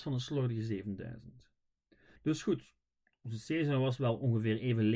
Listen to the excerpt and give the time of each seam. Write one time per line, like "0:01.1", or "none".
0:02.2